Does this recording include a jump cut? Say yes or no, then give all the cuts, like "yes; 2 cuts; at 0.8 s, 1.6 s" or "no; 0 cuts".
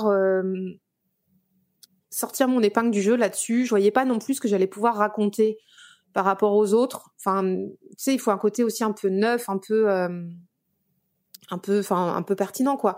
no; 0 cuts